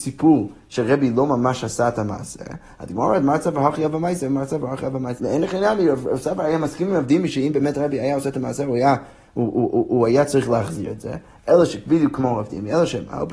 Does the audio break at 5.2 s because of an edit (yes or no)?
yes